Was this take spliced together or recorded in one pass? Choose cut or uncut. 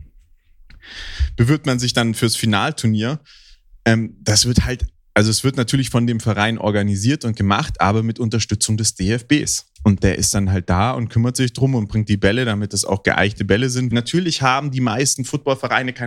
cut